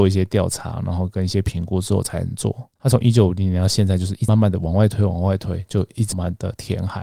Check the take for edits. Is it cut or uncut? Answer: cut